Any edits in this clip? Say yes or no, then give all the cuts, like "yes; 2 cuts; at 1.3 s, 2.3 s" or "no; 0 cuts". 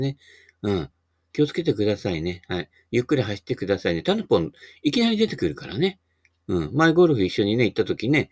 no; 0 cuts